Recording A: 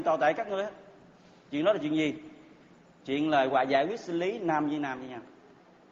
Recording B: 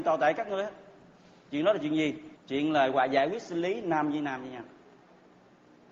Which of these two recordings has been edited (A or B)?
B